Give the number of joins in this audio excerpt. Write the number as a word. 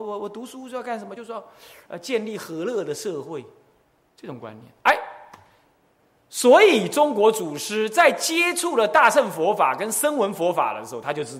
zero